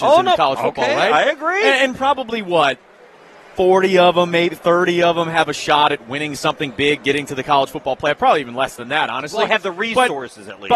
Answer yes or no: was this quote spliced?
no